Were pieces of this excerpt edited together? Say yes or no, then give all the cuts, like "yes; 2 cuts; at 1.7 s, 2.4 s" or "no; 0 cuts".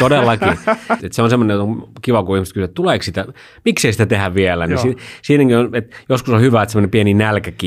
yes; 1 cut; at 1.0 s